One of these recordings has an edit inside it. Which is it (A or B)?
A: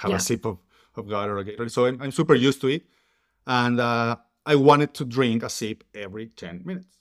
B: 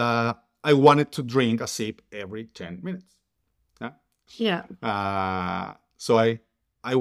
B